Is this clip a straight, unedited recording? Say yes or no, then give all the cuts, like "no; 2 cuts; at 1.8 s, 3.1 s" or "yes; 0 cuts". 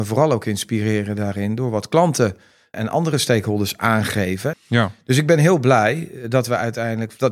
no; 2 cuts; at 2.7 s, 4.5 s